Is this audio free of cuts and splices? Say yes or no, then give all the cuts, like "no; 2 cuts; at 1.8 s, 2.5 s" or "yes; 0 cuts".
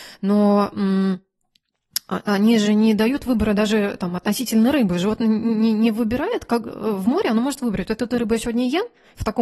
yes; 0 cuts